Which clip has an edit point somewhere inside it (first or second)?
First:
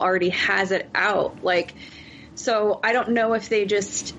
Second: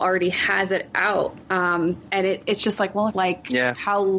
second